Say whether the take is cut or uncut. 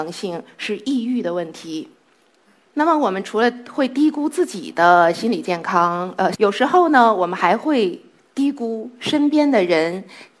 cut